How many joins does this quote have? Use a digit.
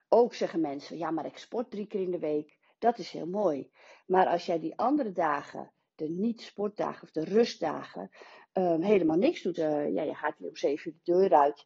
1